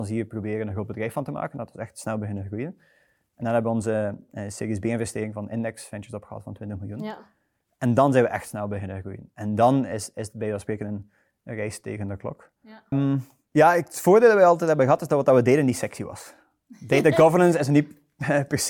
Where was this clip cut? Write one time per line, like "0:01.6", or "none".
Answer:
0:12.9

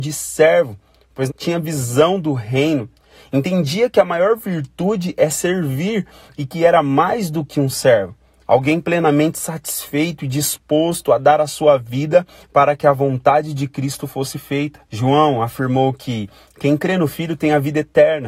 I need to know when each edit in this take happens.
0:01.3
0:08.5
0:14.9

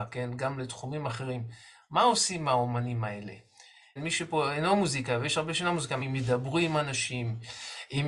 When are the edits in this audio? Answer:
0:04.0
0:06.0

